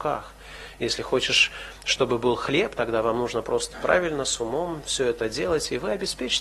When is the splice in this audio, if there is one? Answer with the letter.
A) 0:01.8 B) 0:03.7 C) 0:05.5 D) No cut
B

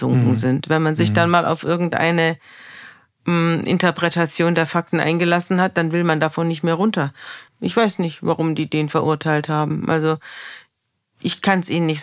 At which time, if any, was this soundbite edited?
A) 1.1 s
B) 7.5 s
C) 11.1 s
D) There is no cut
B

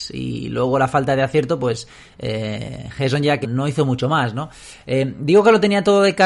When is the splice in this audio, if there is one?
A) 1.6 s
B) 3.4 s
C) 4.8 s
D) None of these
B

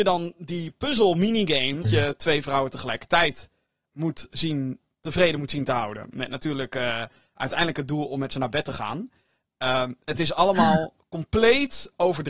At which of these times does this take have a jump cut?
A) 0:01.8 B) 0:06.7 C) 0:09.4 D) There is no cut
A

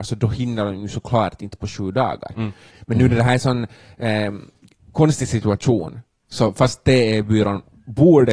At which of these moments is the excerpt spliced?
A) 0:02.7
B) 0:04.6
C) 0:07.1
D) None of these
A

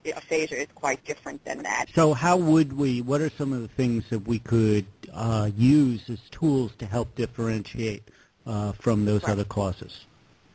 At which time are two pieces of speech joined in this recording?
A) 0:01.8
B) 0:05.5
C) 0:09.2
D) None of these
A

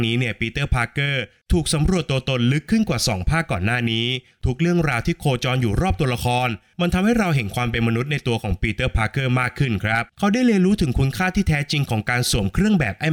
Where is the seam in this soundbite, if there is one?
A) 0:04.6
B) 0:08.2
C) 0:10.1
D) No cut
C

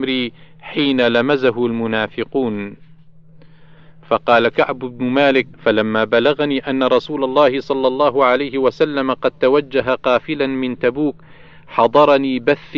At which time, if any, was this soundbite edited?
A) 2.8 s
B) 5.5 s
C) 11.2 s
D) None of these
B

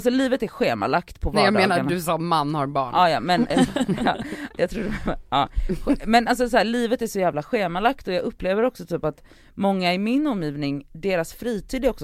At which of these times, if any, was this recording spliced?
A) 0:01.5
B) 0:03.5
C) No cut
B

